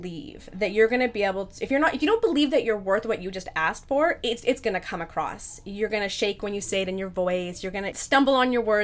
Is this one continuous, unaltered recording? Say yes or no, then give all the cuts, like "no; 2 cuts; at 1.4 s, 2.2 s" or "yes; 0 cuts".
yes; 0 cuts